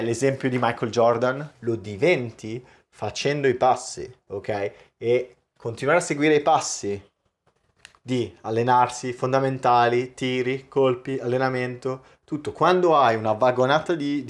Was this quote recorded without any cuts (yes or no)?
no